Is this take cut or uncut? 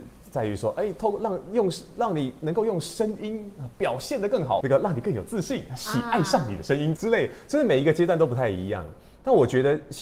cut